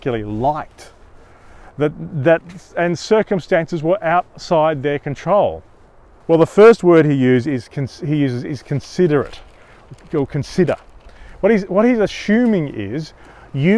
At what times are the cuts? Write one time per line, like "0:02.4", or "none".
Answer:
0:06.2